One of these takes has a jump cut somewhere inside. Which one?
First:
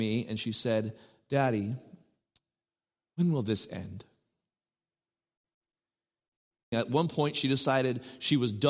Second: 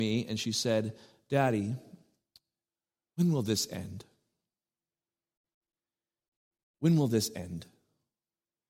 first; 1 cut; at 6.7 s

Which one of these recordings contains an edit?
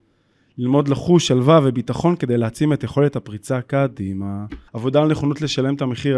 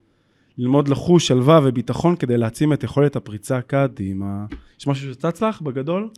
first; 1 cut; at 4.7 s

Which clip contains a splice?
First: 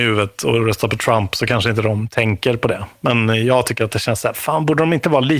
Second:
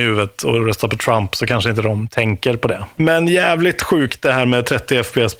second; 1 cut; at 3.0 s

